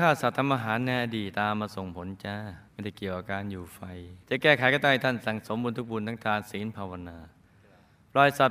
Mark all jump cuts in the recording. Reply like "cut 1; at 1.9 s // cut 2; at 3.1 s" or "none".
cut 1; at 1.3 s // cut 2; at 2.7 s // cut 3; at 4.2 s